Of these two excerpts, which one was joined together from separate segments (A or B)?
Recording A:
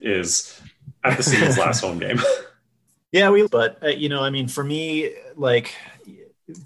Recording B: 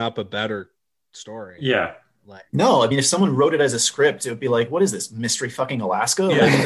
A